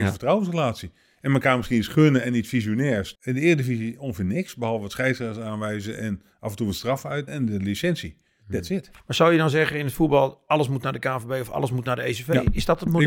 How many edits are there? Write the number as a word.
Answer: two